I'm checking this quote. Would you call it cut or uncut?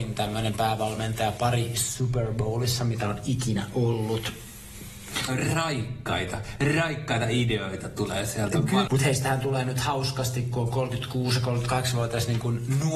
cut